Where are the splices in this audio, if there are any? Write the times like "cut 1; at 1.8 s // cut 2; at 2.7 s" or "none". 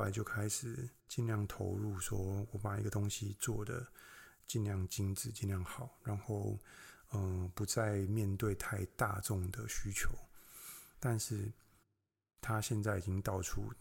cut 1; at 10.9 s